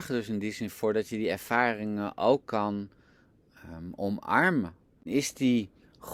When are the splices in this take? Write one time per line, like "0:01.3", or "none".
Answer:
0:05.0